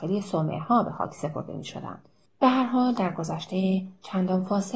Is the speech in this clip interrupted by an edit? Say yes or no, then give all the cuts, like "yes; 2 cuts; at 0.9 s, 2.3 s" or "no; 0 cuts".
yes; 1 cut; at 2.3 s